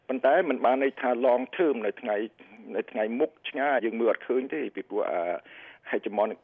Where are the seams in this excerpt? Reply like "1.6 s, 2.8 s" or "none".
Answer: 3.8 s